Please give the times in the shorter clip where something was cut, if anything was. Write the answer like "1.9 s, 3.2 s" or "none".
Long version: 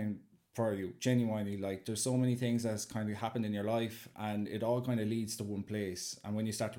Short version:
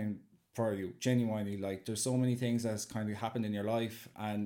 none